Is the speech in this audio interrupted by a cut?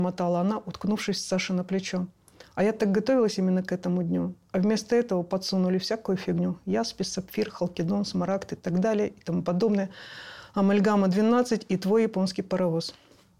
no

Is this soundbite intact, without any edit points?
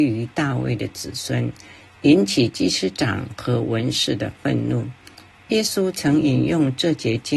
yes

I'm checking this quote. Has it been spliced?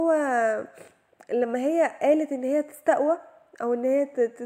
no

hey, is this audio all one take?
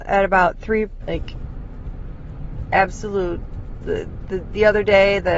no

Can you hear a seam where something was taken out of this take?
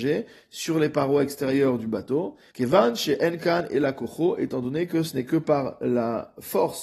yes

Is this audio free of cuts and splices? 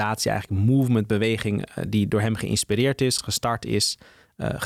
yes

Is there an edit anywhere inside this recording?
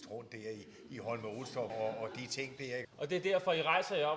yes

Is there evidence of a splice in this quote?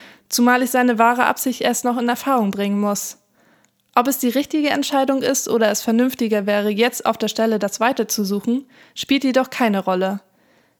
no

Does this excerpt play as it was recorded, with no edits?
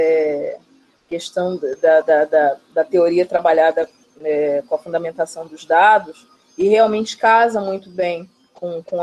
yes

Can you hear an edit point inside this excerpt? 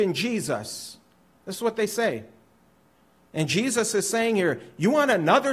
no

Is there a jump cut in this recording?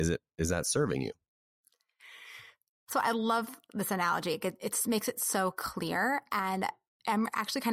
no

